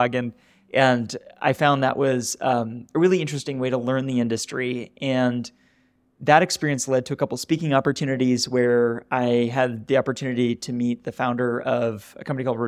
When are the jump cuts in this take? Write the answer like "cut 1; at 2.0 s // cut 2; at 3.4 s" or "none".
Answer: none